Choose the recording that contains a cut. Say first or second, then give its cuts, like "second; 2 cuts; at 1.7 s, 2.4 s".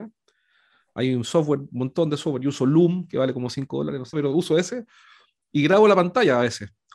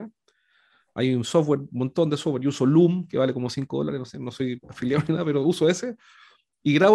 first; 1 cut; at 4.1 s